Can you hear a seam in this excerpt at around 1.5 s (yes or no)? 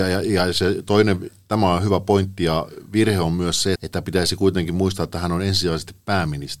no